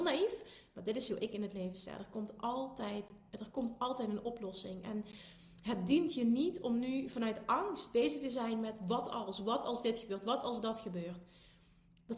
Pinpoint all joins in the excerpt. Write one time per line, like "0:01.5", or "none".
none